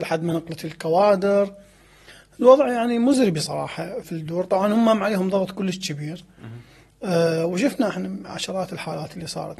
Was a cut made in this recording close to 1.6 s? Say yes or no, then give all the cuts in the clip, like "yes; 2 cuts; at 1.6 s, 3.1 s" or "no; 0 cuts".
no; 1 cut; at 4.0 s